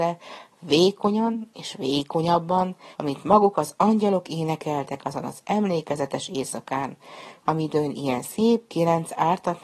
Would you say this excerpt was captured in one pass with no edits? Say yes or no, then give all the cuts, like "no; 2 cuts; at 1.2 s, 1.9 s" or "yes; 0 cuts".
no; 2 cuts; at 2.9 s, 7.4 s